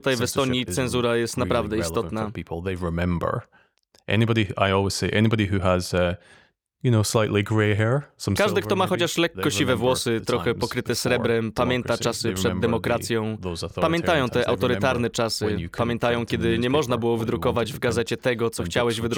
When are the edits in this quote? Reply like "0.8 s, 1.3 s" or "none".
none